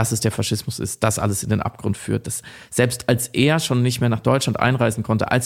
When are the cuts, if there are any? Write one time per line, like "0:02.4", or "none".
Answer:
none